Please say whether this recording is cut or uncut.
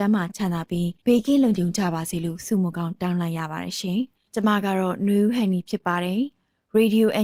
cut